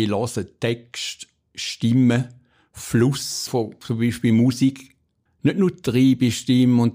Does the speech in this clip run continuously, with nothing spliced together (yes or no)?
no